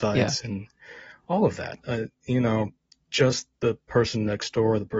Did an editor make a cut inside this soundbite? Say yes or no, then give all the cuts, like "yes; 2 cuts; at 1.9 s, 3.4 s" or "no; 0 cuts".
yes; 1 cut; at 3.5 s